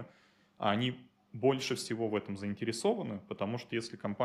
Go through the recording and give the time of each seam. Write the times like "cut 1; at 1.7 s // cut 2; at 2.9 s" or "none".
none